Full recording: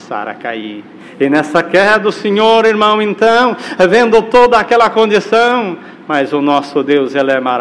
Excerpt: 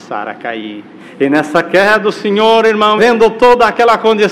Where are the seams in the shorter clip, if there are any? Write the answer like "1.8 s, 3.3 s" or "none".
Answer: 3.0 s